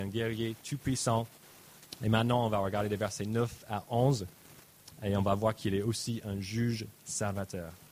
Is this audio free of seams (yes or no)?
yes